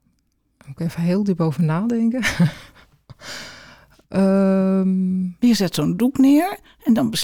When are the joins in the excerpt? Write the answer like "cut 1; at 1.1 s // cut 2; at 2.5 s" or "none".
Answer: none